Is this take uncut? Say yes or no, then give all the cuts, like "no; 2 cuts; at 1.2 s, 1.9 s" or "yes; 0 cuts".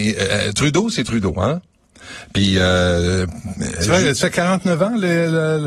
yes; 0 cuts